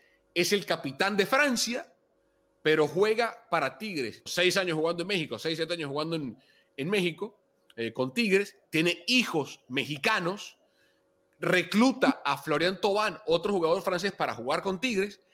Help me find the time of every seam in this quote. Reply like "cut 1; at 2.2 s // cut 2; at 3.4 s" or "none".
cut 1; at 4.3 s